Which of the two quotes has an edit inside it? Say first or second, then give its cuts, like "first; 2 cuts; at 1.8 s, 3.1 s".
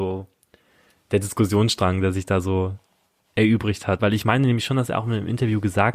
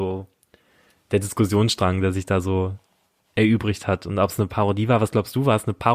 first; 1 cut; at 4.0 s